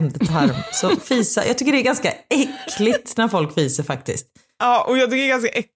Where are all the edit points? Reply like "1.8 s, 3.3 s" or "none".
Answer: none